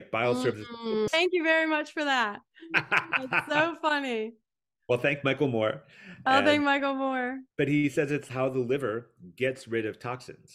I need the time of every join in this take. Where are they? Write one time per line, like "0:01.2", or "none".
0:01.1
0:07.5